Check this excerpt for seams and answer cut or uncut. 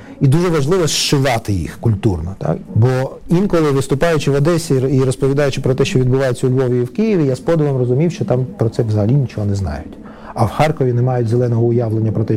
cut